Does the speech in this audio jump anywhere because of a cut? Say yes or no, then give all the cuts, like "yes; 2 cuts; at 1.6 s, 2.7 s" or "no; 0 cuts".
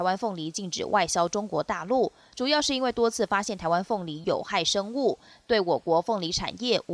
yes; 1 cut; at 4.2 s